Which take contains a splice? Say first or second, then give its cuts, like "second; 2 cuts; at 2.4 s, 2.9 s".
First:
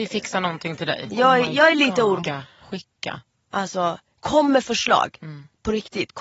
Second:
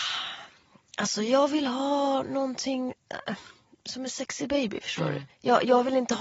first; 2 cuts; at 1.1 s, 2.2 s